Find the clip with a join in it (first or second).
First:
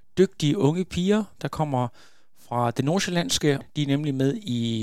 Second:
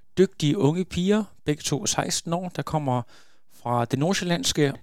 first